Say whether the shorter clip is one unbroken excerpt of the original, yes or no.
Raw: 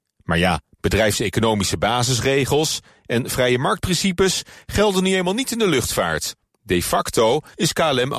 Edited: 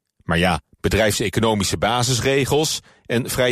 yes